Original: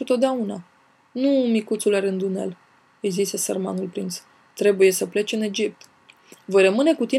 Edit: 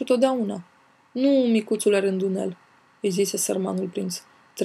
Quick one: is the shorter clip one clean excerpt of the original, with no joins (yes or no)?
yes